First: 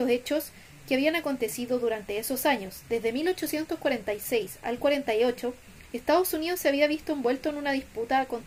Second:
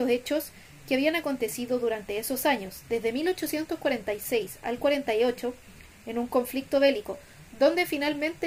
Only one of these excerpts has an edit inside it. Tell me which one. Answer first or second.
second